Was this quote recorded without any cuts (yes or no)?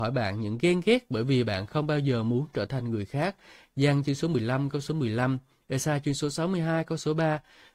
yes